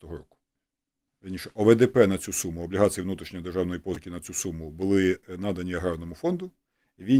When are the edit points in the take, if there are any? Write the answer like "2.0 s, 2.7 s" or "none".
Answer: 1.1 s